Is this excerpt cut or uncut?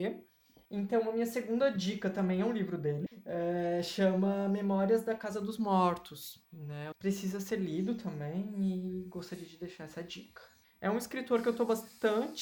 cut